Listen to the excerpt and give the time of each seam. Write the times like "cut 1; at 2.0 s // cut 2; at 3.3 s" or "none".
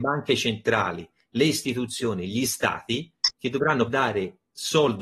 cut 1; at 3.9 s